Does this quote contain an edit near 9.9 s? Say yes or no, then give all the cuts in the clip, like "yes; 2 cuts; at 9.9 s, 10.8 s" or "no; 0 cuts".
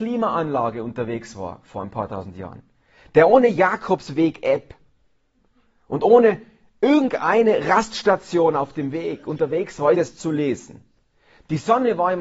yes; 1 cut; at 9.9 s